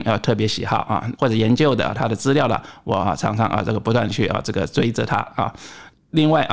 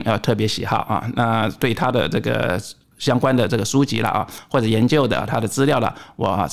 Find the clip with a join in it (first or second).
first